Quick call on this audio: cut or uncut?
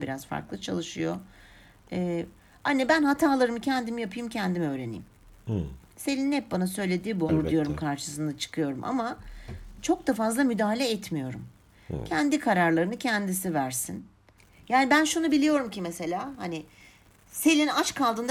cut